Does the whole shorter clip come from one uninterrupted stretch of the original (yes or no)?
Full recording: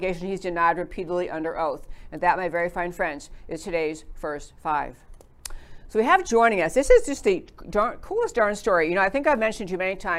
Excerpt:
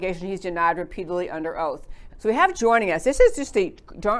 no